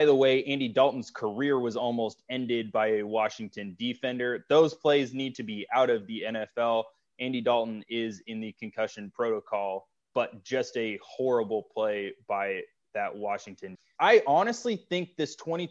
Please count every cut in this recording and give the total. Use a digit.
2